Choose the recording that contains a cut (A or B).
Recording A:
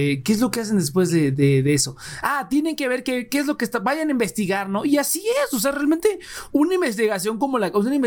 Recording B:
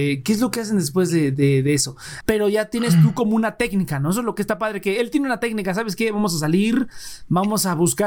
B